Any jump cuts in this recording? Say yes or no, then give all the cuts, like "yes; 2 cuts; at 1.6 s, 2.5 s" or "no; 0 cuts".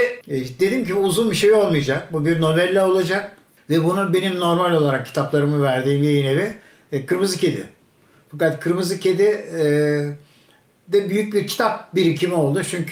no; 0 cuts